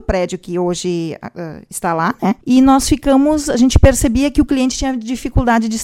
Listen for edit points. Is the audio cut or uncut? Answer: cut